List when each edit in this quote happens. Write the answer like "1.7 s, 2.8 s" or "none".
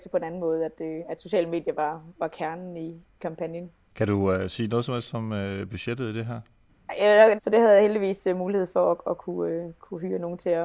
3.2 s, 7.4 s